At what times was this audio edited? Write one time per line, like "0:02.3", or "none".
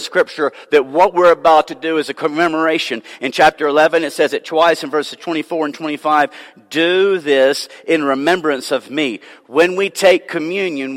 none